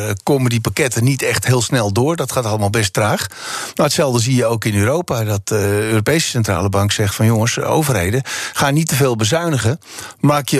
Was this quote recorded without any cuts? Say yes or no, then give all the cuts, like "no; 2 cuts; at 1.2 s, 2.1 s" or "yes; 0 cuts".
yes; 0 cuts